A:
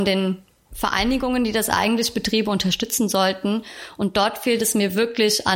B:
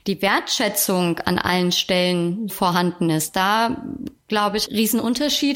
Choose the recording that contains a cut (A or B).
B